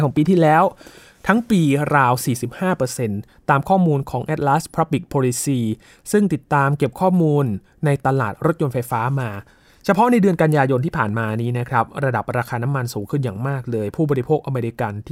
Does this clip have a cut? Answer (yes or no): no